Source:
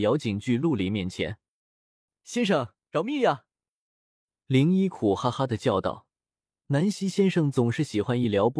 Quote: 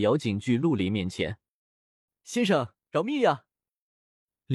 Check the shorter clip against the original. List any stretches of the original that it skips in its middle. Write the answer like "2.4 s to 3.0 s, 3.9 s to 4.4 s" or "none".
none